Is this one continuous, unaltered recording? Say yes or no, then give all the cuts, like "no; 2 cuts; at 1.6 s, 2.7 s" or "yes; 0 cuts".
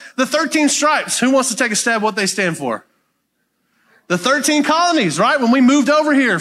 yes; 0 cuts